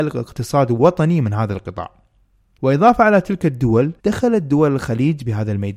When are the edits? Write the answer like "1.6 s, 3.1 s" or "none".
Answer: 2.6 s, 4.0 s